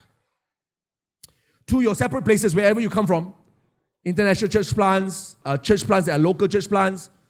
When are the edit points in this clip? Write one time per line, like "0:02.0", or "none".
0:05.4